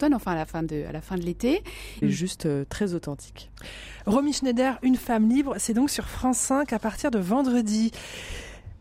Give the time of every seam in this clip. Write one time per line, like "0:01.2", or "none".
0:02.0